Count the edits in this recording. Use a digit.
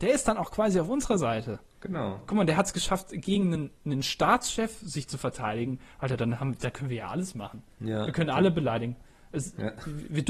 0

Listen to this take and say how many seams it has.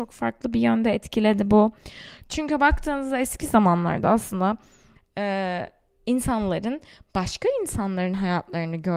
1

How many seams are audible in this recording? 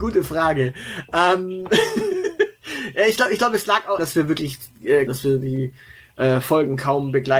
2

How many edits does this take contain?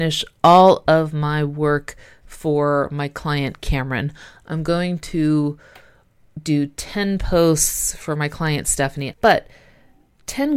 1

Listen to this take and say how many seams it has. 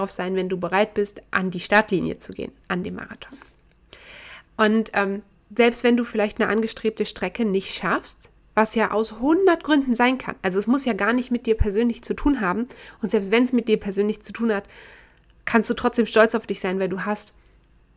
1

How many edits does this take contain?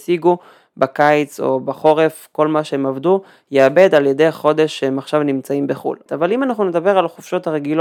1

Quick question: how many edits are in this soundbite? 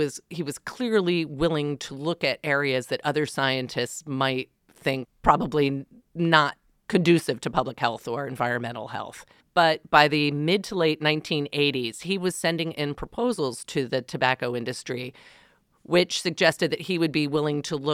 2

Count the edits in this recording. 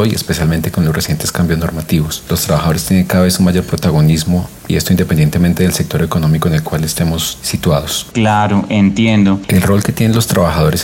2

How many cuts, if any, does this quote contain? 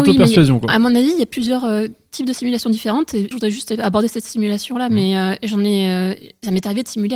1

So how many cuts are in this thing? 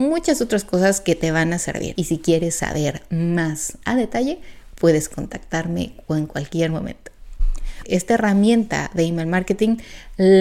2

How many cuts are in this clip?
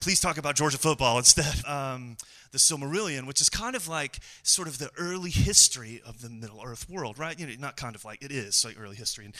1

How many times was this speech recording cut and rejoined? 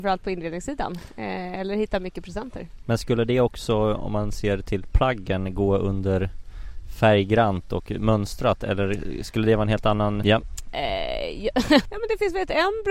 2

